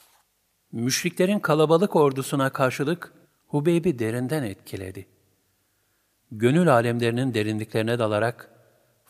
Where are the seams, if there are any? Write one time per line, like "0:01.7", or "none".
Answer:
0:03.2